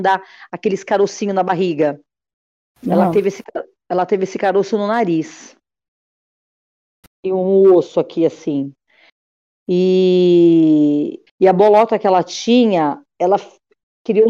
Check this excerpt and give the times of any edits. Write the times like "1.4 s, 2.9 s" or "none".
7.0 s, 11.3 s